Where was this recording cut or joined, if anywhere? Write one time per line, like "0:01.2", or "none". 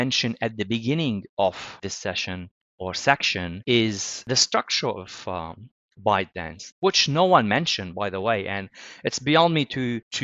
0:06.7